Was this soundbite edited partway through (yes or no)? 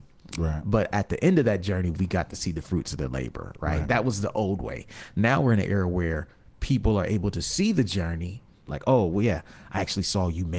yes